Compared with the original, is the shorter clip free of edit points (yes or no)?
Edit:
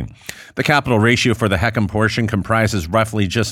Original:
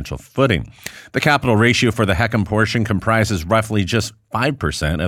yes